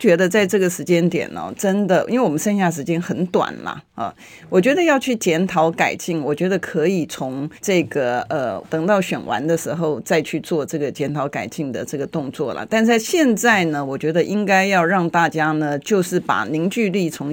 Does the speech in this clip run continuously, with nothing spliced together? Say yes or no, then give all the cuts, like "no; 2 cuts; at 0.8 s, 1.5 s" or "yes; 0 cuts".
no; 2 cuts; at 7.6 s, 8.6 s